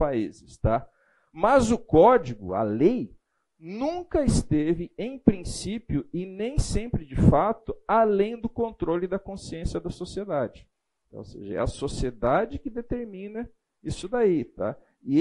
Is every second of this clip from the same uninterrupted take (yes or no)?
yes